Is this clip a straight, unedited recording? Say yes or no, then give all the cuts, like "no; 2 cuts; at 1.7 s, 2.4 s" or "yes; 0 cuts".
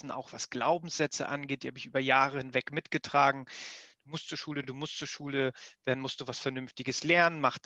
yes; 0 cuts